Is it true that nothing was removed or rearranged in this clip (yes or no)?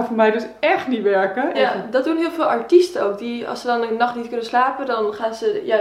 no